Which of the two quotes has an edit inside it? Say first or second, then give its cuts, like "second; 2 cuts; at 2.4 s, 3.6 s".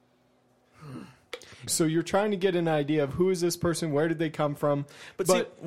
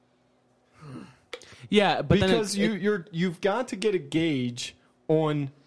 first; 1 cut; at 1.7 s